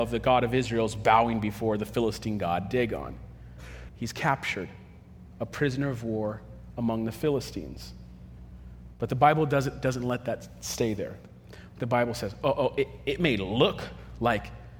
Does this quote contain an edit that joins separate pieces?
yes; 1 cut; at 3.9 s

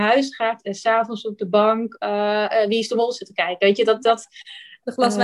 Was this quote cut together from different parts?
no; 0 cuts

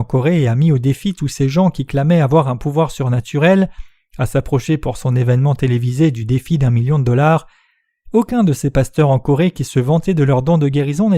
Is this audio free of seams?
yes; 0 cuts

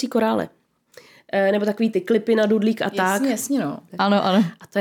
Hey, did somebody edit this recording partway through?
yes; 1 cut; at 3.9 s

